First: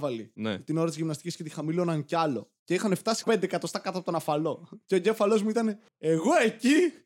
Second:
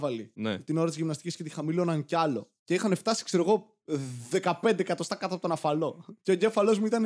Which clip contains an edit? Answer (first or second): first